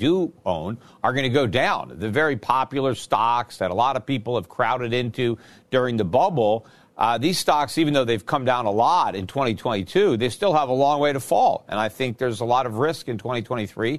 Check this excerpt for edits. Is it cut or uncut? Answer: uncut